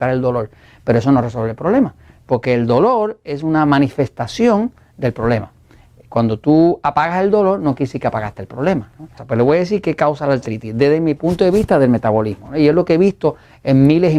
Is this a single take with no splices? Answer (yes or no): no